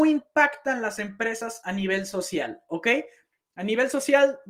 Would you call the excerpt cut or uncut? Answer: uncut